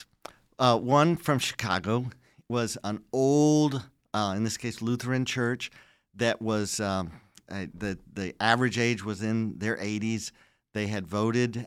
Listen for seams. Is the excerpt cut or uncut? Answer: uncut